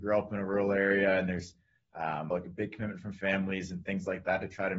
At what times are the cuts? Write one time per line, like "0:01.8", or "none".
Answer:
0:02.3